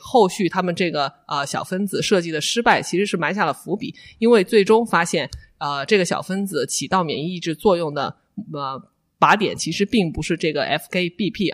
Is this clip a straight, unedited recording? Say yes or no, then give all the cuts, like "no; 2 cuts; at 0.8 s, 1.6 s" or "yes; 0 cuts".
yes; 0 cuts